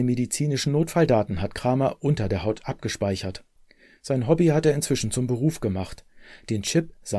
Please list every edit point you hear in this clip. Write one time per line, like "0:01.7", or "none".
none